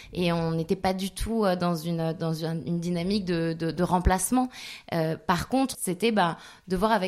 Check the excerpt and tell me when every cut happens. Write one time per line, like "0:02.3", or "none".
0:05.7